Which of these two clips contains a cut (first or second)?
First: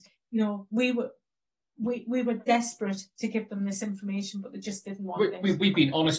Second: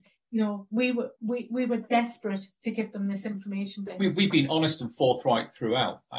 second